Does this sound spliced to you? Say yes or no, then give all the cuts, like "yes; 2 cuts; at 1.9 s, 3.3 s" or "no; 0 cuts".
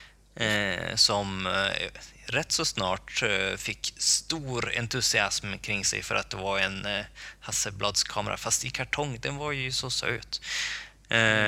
no; 0 cuts